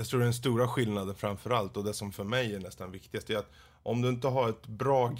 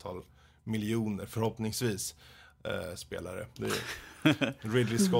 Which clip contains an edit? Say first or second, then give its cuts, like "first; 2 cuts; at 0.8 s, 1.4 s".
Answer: second; 1 cut; at 3.6 s